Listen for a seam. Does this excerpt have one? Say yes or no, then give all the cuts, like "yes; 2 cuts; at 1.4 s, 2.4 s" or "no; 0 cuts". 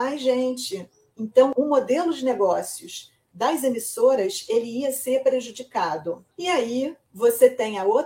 yes; 1 cut; at 6.3 s